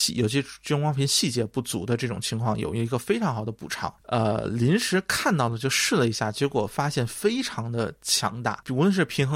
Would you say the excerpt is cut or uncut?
cut